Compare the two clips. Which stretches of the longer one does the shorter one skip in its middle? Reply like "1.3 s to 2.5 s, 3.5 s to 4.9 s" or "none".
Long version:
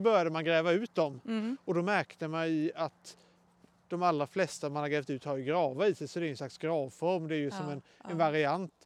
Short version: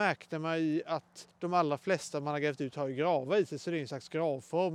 3.2 s to 3.8 s